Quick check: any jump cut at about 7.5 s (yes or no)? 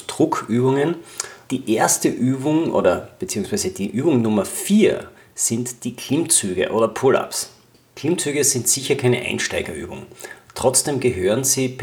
no